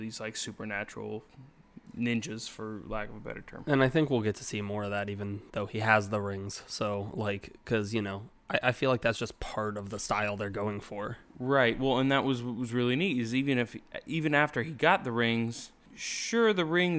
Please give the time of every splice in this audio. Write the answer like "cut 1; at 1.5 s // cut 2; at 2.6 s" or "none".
none